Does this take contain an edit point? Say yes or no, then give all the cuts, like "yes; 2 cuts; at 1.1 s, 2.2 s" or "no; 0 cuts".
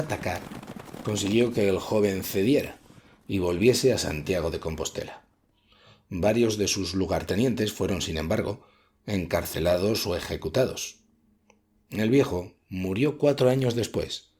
no; 0 cuts